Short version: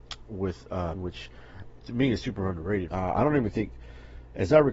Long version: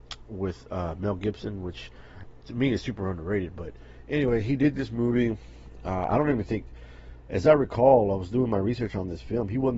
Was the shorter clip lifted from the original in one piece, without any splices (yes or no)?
no